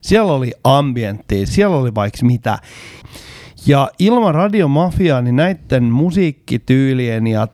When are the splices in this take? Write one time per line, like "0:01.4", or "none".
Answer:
0:01.5
0:03.0